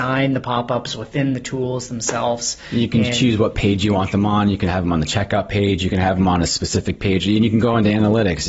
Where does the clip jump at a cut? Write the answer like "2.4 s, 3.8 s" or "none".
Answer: none